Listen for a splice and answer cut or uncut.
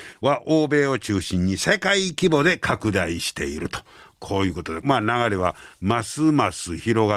cut